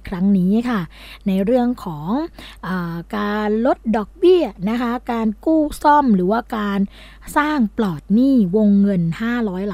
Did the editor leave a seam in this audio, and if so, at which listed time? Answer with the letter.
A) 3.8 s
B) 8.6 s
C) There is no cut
C